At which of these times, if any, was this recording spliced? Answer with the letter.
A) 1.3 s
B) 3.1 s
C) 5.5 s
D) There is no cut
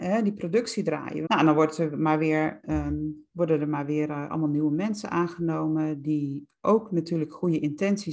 A